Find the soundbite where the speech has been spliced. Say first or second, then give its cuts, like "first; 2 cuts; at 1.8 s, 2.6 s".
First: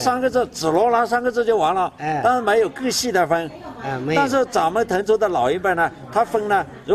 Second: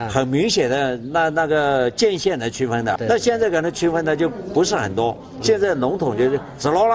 second; 1 cut; at 3.0 s